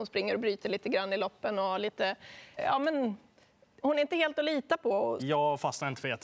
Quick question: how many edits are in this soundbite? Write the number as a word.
two